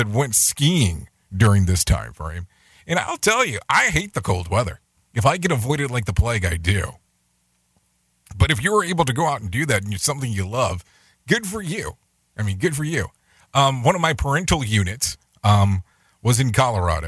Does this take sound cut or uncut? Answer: uncut